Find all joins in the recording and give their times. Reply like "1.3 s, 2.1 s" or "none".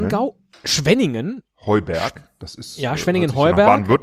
none